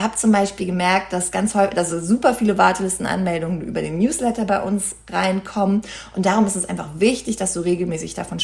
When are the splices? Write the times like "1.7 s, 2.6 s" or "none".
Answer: none

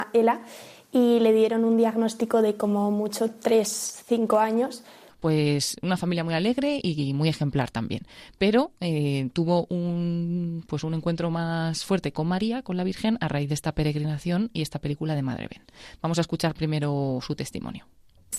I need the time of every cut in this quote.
5.1 s

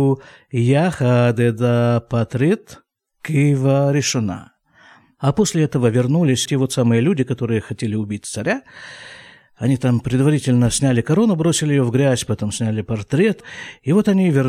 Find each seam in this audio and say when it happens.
6.5 s

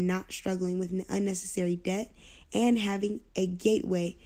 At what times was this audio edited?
3.3 s

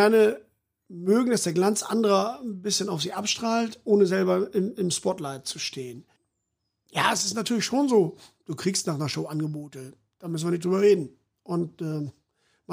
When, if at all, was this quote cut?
none

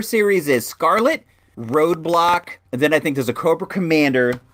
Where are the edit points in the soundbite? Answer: 1.5 s, 2.7 s

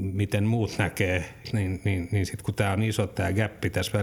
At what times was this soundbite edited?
1.4 s

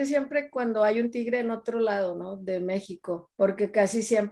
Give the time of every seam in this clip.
3.3 s

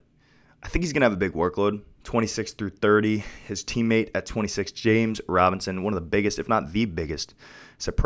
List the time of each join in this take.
2.0 s

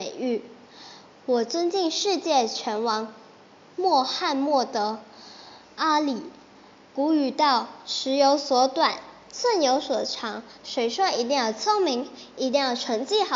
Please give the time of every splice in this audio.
10.6 s

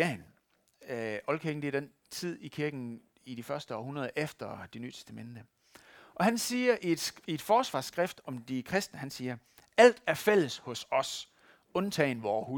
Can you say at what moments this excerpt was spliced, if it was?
none

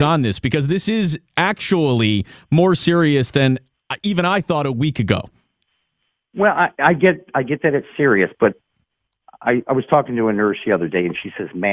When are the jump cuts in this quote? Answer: none

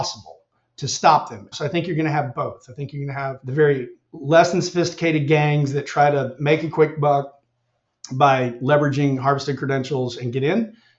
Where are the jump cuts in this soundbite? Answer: 1.5 s

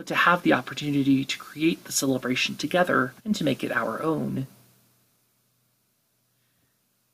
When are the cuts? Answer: 3.2 s

